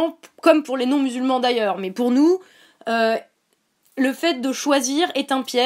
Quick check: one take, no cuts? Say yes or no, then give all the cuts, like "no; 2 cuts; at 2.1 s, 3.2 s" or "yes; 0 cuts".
yes; 0 cuts